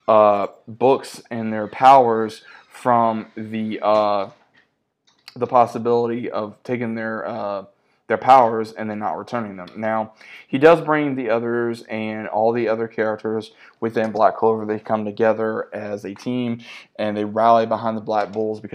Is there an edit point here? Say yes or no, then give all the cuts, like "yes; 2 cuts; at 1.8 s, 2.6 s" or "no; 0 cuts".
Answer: no; 0 cuts